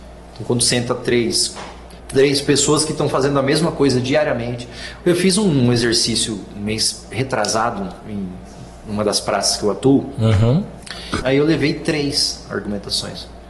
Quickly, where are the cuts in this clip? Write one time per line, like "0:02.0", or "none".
0:02.0
0:11.2